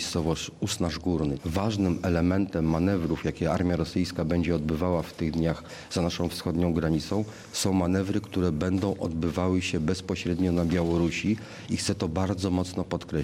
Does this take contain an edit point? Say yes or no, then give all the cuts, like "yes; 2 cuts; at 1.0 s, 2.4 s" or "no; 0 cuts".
yes; 1 cut; at 1.4 s